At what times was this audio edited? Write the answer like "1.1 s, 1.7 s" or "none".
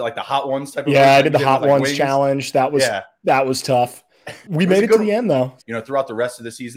4.4 s, 5.6 s